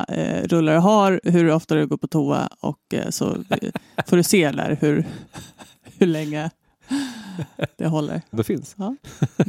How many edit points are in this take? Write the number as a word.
one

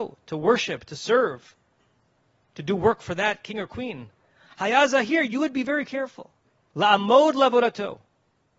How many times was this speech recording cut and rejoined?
one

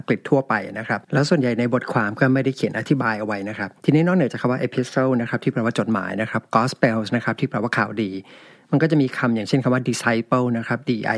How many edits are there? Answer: one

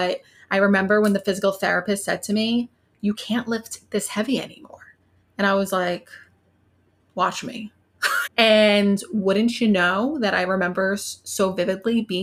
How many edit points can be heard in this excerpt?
one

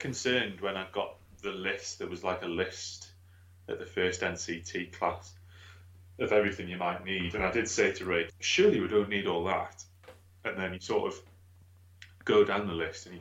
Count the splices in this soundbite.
one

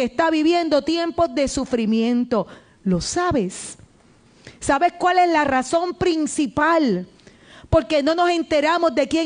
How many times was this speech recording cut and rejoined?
zero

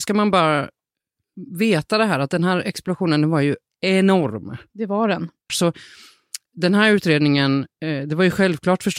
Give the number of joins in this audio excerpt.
one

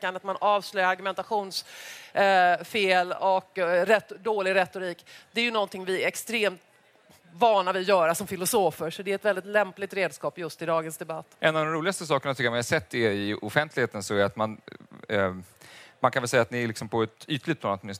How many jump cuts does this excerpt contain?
one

